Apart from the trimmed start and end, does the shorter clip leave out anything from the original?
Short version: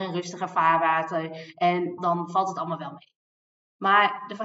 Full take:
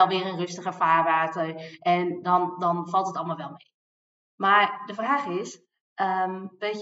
yes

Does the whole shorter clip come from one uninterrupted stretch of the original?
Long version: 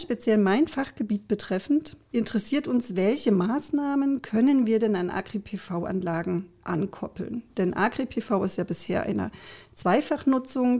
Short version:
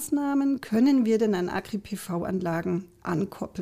yes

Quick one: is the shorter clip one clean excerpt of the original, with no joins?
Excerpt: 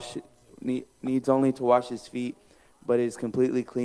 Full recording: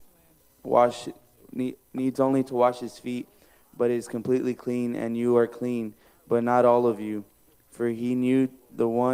yes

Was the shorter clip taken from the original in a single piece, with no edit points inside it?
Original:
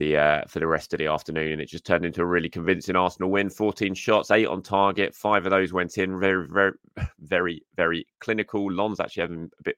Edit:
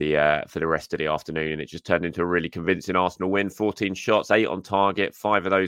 yes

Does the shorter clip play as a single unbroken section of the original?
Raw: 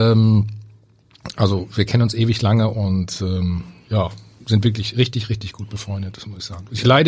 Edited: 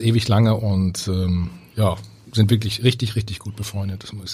yes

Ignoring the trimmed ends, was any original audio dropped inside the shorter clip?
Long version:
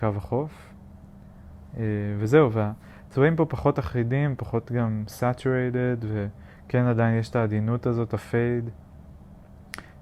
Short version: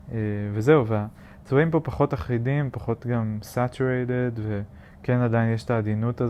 no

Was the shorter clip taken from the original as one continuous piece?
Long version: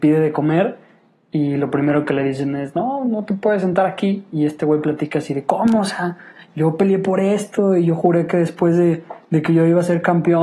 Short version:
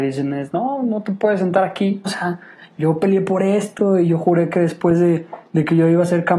no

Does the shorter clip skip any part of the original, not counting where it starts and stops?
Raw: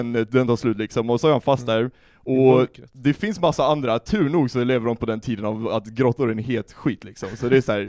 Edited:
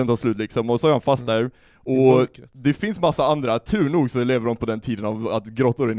no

